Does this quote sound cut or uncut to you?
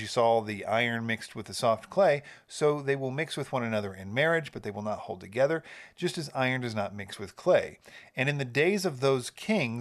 uncut